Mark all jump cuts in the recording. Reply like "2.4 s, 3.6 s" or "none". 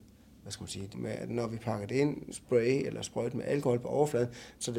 0.9 s, 2.3 s